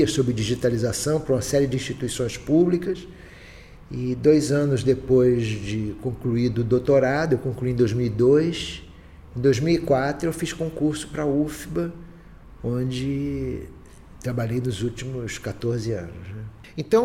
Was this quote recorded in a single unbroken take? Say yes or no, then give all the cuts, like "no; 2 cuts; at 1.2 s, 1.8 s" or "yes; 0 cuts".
yes; 0 cuts